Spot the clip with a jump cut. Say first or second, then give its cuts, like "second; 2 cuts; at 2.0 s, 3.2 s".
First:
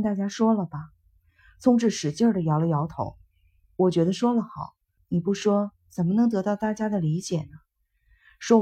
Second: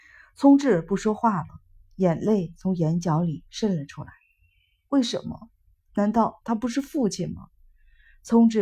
first; 2 cuts; at 3.6 s, 5.0 s